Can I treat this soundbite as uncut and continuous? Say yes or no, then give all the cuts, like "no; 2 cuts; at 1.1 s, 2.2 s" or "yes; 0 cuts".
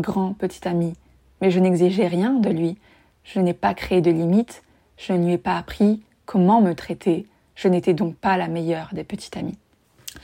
yes; 0 cuts